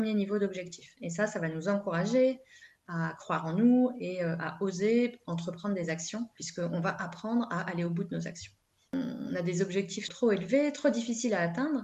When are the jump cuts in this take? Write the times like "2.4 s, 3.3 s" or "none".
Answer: 8.9 s, 10.1 s